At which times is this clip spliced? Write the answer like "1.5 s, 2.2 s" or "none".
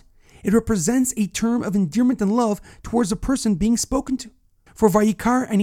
4.7 s